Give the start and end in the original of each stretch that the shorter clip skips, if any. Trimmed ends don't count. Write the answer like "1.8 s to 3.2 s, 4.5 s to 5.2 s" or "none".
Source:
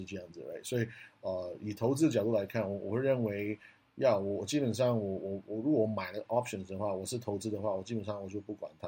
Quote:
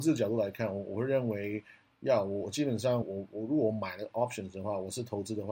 5.0 s to 5.2 s